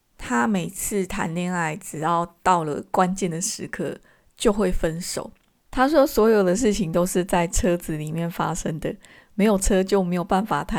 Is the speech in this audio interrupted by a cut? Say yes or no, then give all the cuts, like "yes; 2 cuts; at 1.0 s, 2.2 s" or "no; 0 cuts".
yes; 1 cut; at 5.7 s